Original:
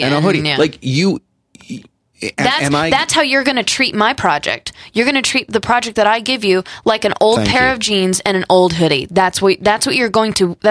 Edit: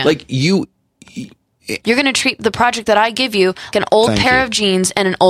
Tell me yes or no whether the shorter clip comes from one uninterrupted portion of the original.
no